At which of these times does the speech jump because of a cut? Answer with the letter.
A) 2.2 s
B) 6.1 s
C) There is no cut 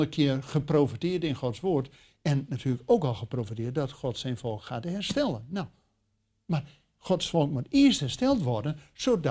C